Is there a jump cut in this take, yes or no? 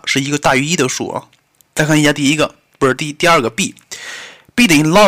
no